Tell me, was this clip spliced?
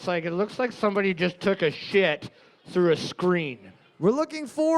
no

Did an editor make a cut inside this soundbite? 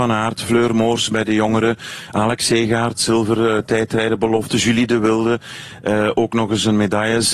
no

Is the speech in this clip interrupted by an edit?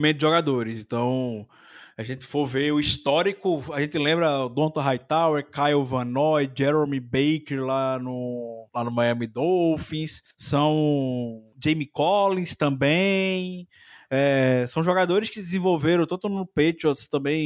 yes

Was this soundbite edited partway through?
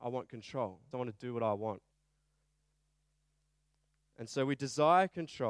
yes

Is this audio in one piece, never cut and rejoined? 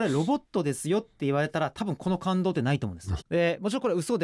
no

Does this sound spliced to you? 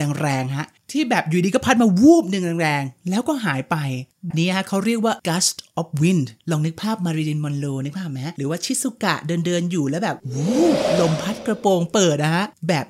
yes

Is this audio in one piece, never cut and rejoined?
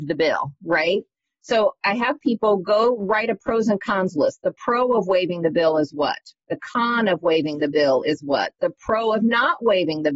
yes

